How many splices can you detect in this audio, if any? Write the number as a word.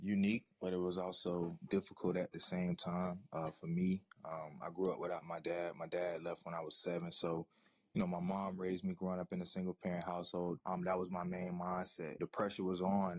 two